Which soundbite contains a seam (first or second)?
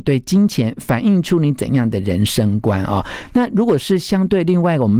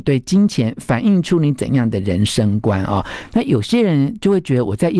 second